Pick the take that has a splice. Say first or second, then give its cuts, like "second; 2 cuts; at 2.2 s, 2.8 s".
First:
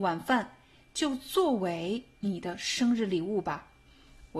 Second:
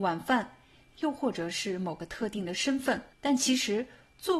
second; 2 cuts; at 0.9 s, 3.1 s